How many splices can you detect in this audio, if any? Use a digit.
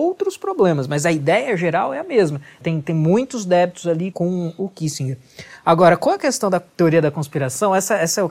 2